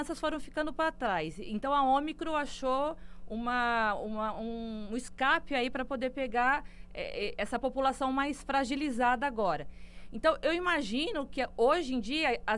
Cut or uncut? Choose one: uncut